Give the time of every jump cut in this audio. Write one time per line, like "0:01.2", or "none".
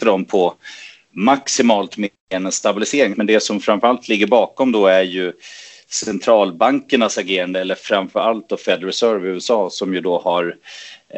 0:03.1